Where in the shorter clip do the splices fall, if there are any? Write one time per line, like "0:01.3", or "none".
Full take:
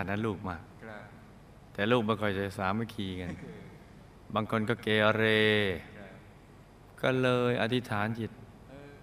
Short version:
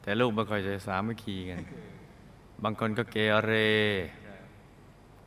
none